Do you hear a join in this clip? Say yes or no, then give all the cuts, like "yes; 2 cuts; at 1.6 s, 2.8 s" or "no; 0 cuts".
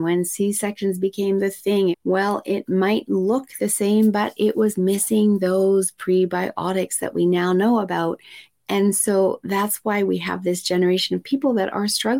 yes; 1 cut; at 1.9 s